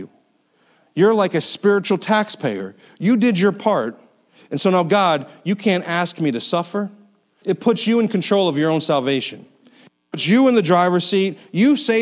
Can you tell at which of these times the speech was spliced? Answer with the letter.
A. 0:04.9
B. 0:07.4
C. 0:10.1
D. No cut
B